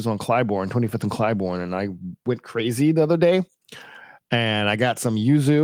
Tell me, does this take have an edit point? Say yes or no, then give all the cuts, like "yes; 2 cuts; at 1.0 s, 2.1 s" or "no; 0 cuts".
no; 0 cuts